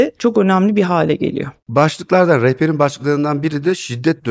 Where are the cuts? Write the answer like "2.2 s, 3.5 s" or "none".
none